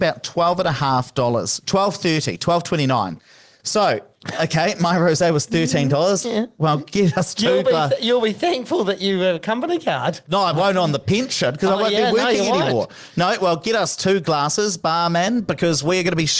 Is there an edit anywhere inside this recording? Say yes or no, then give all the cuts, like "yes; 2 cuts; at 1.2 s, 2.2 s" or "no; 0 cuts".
yes; 1 cut; at 6.2 s